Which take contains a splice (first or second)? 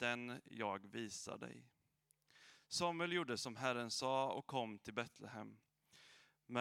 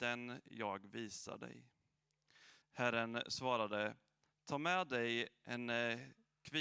second